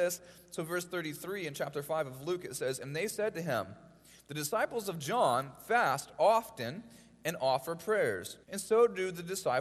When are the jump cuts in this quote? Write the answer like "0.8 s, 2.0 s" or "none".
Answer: 8.4 s

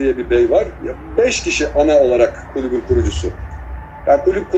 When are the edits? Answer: none

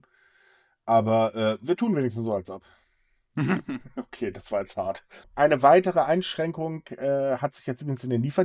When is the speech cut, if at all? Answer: none

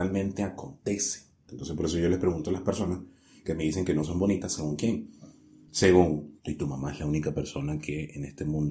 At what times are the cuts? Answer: 1.5 s, 6.4 s

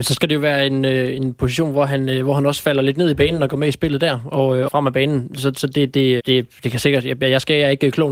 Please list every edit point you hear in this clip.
4.7 s, 6.2 s

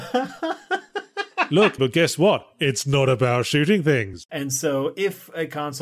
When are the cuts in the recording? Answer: 1.8 s, 4.3 s

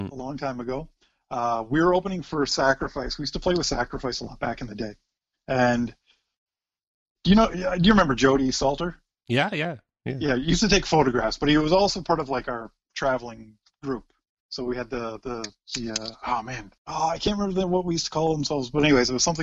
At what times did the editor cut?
16.8 s

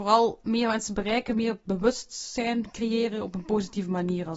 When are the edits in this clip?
none

